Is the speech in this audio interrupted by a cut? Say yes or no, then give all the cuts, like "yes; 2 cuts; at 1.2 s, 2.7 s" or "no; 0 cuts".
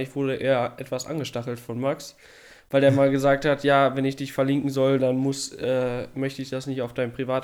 no; 0 cuts